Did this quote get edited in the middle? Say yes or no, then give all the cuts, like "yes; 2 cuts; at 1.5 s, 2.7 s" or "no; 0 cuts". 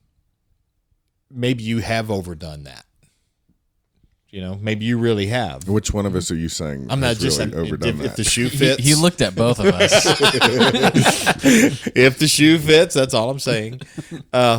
no; 0 cuts